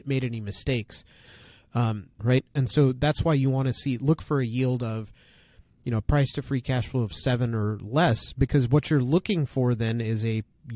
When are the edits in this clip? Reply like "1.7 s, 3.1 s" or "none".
2.2 s